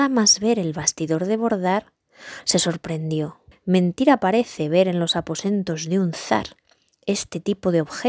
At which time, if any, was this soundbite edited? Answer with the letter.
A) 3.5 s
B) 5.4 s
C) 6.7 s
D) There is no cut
A